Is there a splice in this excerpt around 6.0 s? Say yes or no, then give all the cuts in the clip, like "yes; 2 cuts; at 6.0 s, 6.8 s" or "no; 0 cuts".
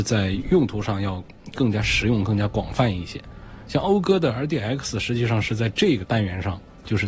yes; 1 cut; at 6.0 s